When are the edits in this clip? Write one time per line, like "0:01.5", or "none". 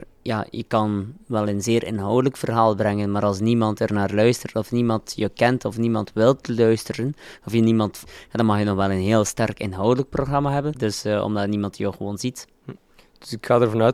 0:08.1
0:10.7